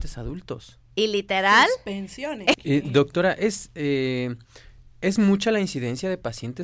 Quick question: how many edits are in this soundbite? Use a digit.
2